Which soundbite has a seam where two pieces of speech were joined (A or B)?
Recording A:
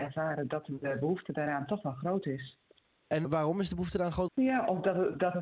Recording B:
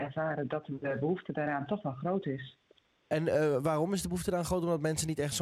A